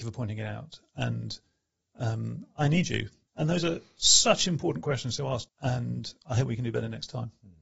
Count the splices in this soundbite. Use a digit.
2